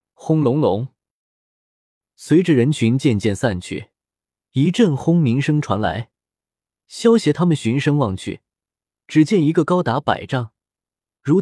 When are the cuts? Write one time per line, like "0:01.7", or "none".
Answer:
none